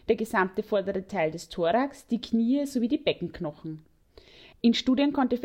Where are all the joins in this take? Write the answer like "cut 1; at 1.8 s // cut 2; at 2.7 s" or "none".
cut 1; at 4.5 s